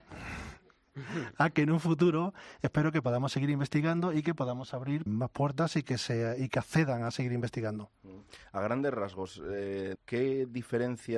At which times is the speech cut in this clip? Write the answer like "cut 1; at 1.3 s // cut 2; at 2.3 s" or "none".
cut 1; at 5.1 s // cut 2; at 10.0 s